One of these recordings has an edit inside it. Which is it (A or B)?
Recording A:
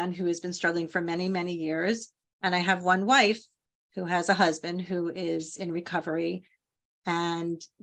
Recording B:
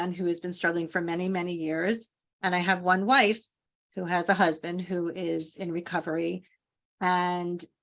A